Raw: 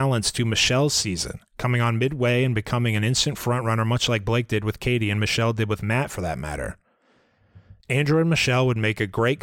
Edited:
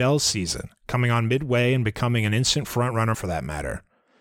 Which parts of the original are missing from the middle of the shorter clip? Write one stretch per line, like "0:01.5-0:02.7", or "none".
0:03.8-0:06.1